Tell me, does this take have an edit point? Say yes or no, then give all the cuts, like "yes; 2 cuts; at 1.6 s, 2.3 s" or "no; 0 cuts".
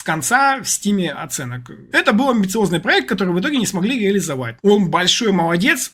yes; 2 cuts; at 1.9 s, 4.6 s